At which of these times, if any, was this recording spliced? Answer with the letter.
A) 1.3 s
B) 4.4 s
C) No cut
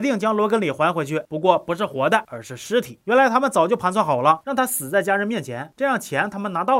B